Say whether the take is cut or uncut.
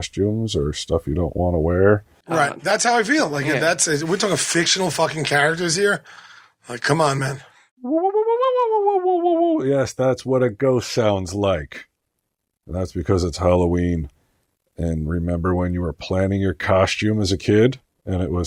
cut